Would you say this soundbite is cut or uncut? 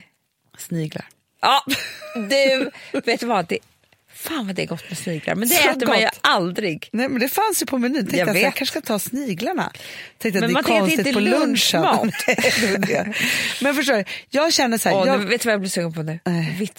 uncut